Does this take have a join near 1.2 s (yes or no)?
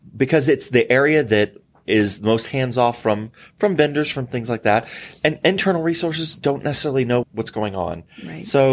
no